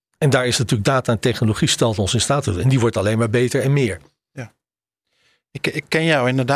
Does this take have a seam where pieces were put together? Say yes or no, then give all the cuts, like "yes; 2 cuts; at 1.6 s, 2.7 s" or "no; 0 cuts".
no; 0 cuts